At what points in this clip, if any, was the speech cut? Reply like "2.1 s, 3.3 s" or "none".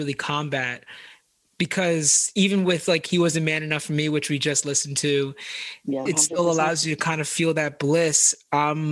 6.1 s